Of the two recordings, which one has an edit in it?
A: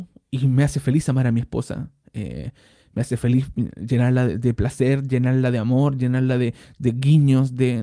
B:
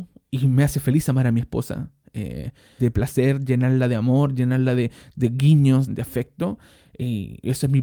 B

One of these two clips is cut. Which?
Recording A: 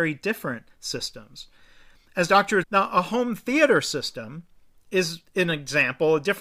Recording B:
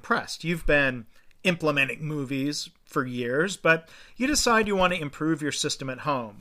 A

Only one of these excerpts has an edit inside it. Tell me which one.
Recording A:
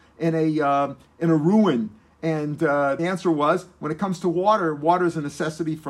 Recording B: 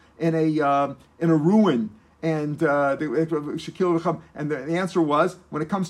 A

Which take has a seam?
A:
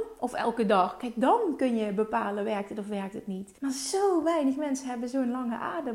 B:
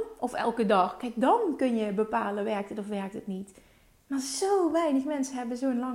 A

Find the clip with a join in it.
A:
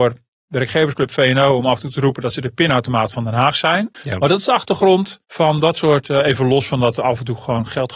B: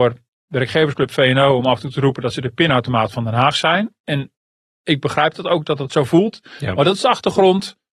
A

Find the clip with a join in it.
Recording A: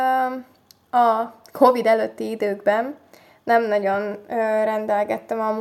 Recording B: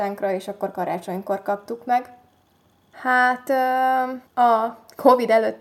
B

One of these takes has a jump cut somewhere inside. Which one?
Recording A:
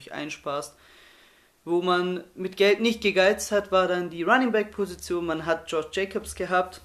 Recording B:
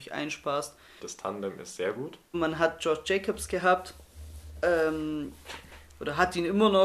B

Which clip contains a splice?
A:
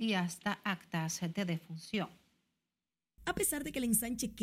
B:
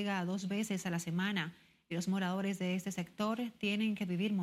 A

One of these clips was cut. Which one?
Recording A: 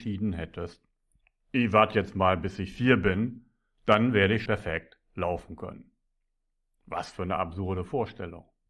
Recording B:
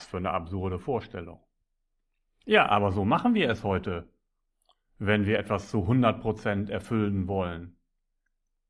A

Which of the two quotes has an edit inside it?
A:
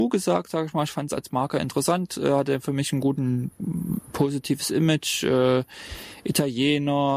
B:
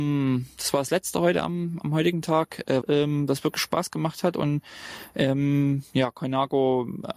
B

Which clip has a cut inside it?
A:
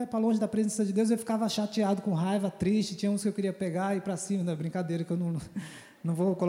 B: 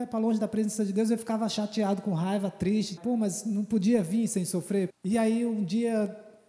B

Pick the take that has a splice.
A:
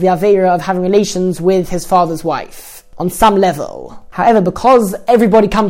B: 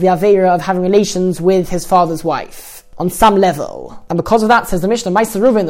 B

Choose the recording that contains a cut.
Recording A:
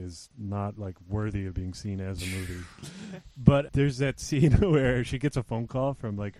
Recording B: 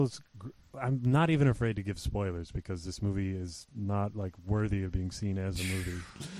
A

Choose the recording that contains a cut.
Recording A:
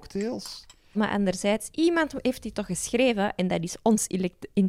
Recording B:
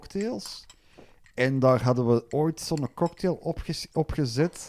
A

